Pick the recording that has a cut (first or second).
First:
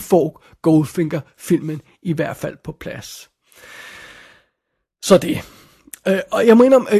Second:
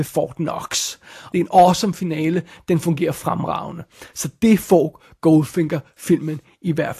second